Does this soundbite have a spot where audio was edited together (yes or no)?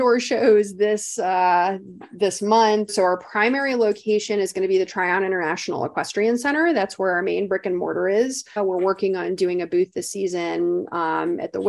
yes